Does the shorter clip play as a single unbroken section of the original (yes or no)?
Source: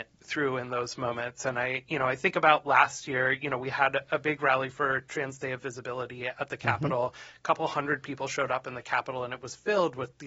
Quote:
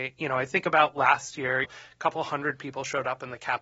no